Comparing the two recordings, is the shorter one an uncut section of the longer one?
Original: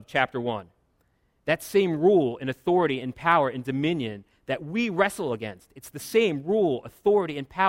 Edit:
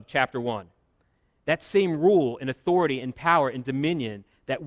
yes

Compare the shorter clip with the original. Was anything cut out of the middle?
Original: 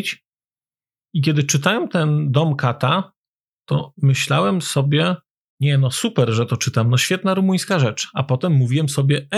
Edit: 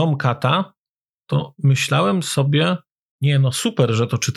no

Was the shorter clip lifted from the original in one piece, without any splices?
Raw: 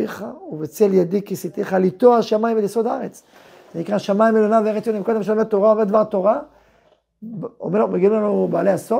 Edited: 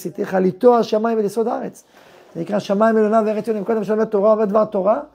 yes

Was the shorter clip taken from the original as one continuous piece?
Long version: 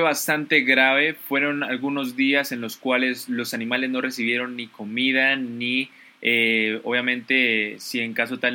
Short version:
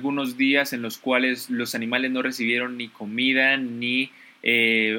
yes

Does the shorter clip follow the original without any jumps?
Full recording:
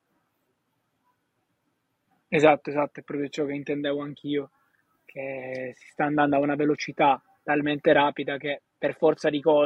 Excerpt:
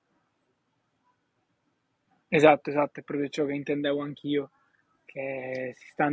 yes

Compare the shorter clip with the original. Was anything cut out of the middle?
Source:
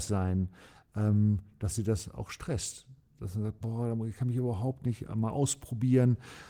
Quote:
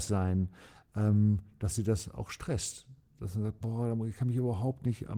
no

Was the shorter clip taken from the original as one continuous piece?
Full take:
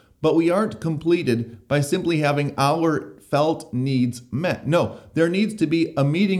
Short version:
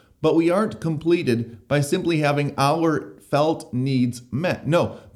yes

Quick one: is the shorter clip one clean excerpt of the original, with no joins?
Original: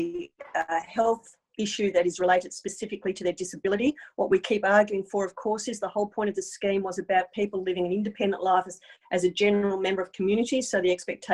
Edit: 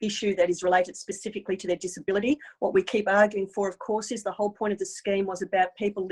yes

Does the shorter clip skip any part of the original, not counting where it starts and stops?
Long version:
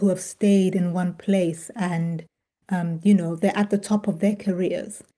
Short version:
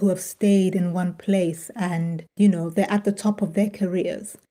yes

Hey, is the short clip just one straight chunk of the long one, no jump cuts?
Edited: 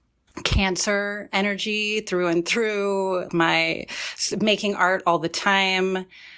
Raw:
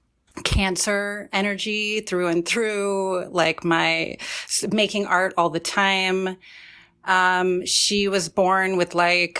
no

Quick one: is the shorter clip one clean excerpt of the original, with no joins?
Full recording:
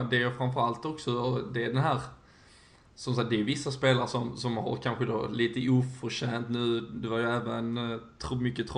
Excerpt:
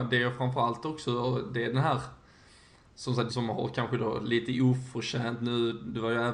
no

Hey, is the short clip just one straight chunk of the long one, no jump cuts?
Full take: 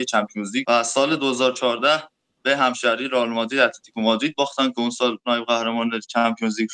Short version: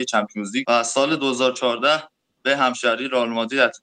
yes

